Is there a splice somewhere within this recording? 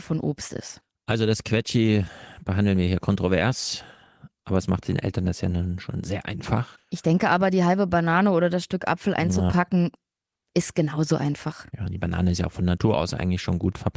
no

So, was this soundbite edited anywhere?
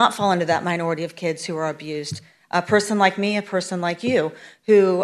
no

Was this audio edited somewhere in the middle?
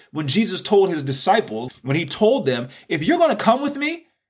yes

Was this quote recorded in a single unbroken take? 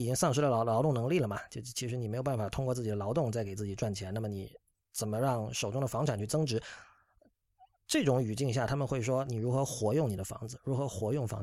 yes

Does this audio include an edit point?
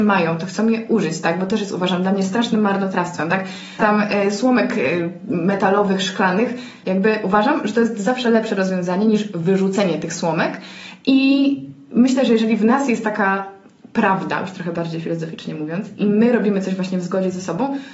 yes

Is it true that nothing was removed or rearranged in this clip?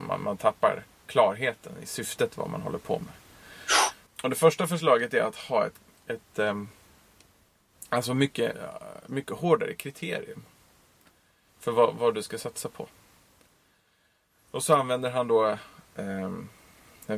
no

